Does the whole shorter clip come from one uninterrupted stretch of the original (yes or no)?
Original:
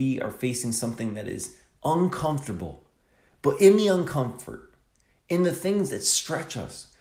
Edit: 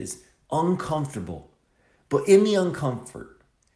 yes